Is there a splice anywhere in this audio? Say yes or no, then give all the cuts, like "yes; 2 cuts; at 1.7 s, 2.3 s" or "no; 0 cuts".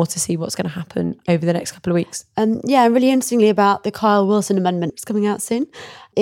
yes; 1 cut; at 4.9 s